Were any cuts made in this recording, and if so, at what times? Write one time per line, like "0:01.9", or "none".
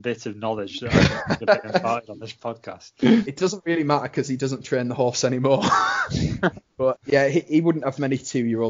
0:06.9